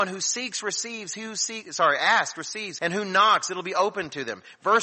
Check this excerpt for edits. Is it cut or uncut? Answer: cut